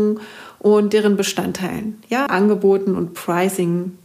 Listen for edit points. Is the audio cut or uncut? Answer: cut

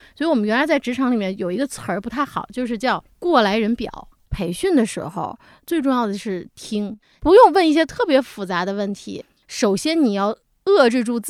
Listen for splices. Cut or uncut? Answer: cut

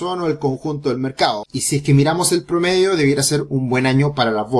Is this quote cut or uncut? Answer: cut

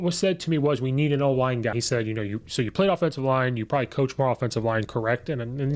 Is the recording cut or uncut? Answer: cut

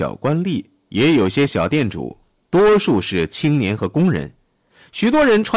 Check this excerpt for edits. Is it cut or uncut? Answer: uncut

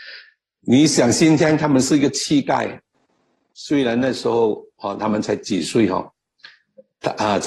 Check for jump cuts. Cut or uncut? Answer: uncut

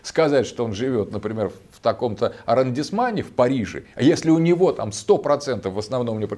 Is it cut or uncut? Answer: uncut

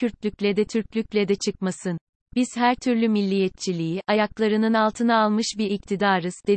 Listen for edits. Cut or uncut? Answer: uncut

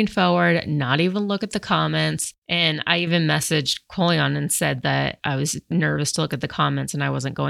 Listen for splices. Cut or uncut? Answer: cut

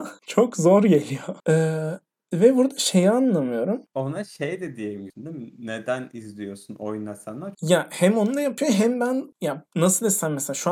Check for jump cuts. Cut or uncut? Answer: cut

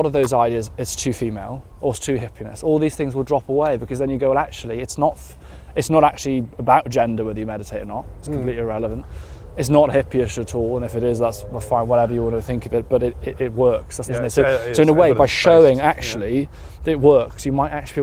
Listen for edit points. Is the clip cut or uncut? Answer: cut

